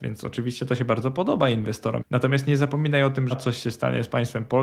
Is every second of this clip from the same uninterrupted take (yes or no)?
no